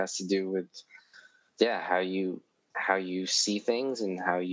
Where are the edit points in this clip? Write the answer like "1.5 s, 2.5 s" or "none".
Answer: 1.5 s